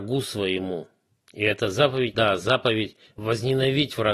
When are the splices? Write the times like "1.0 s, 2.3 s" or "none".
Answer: 2.1 s